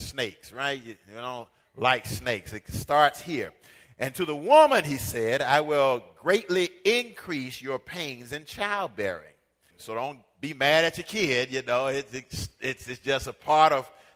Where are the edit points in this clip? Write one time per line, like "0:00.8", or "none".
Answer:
0:09.7